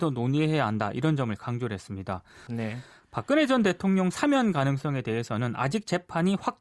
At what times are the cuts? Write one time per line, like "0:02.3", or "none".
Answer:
0:02.5